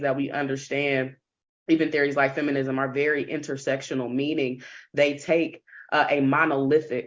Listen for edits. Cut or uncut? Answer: uncut